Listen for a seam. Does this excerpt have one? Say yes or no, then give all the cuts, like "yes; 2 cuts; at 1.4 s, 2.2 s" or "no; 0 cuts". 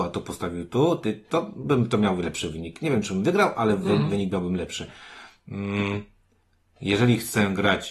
no; 0 cuts